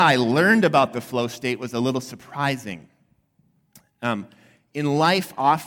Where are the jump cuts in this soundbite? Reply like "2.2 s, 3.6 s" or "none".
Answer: none

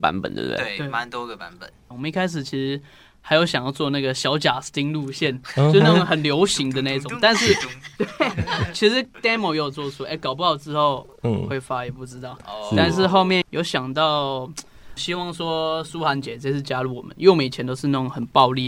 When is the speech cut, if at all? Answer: 13.4 s, 15.0 s

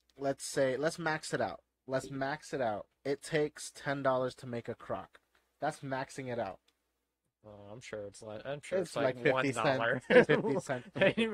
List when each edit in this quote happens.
3.0 s, 10.3 s

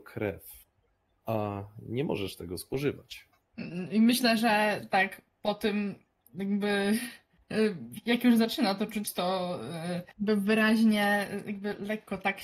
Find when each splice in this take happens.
none

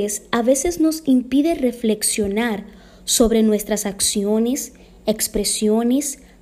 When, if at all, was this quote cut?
none

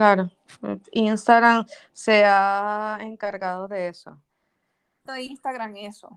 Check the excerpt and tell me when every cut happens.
5.1 s

